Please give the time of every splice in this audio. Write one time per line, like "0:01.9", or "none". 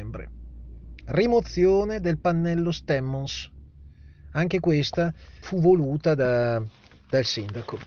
0:05.4